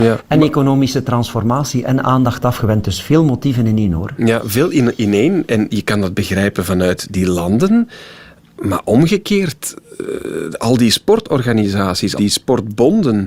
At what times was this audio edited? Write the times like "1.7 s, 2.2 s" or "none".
12.2 s